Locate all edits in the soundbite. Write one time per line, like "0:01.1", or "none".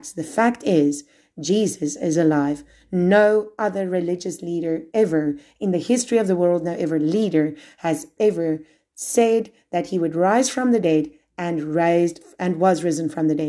0:08.2